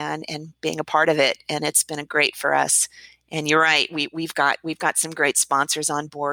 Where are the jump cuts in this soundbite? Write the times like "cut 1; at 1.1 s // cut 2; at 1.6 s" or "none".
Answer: none